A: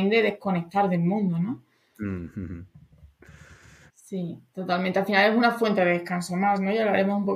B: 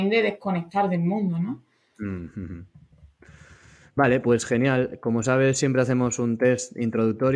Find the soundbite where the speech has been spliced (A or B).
A